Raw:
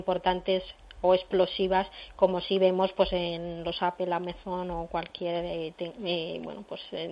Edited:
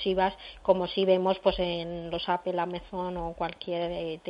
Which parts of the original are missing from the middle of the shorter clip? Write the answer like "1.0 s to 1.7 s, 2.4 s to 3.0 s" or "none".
none